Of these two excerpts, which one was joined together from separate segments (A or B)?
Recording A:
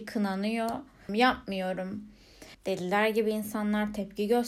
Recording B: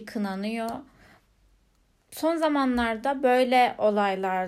A